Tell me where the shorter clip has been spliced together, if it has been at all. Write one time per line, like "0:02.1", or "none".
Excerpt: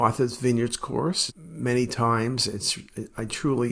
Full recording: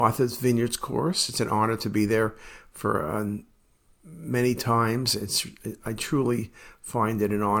0:01.3